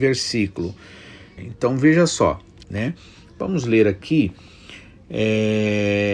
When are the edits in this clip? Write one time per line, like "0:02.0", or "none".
0:01.4
0:02.6